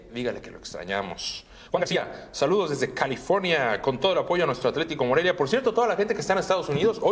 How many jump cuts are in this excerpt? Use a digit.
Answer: 0